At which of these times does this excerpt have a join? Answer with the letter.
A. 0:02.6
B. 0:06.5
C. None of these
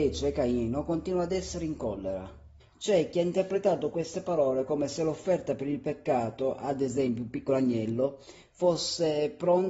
A